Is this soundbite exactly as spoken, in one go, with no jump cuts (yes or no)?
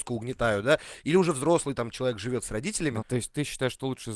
no